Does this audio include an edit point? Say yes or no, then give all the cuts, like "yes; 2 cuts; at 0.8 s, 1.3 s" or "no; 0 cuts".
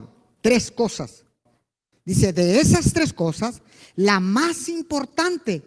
no; 0 cuts